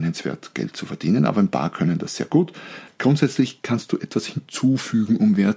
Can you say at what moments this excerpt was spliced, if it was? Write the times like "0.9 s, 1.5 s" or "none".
2.9 s